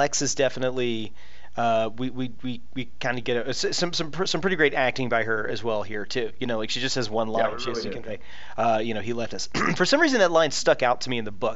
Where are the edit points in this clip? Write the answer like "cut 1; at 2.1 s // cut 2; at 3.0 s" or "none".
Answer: none